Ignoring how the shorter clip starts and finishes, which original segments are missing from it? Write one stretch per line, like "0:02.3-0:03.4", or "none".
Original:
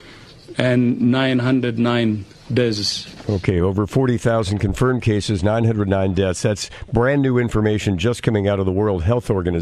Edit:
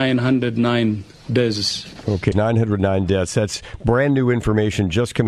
0:03.5-0:05.4